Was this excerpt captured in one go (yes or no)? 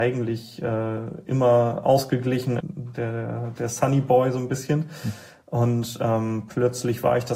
no